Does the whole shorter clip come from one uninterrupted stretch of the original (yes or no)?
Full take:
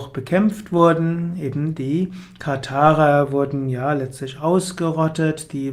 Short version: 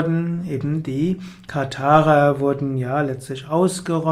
yes